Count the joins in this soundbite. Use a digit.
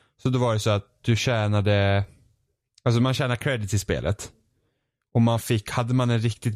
0